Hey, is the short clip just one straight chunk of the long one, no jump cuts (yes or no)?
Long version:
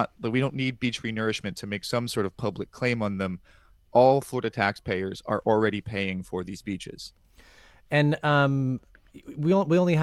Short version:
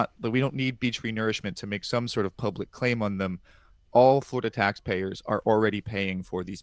yes